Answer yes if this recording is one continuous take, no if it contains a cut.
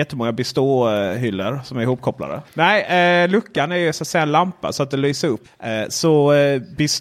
no